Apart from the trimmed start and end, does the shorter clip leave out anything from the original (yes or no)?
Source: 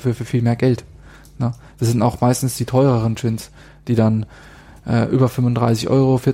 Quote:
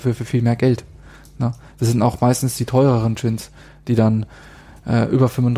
no